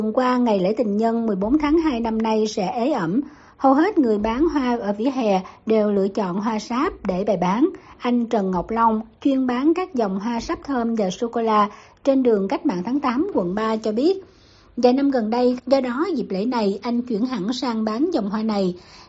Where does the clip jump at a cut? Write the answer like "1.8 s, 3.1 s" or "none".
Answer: 15.6 s

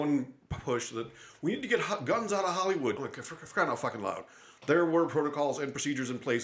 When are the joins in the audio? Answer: 3.0 s

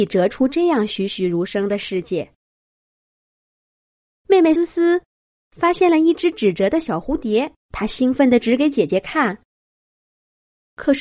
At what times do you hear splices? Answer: 4.6 s, 7.6 s

